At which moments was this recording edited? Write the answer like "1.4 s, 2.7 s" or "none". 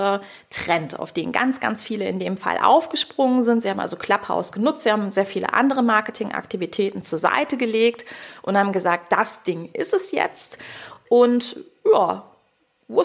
none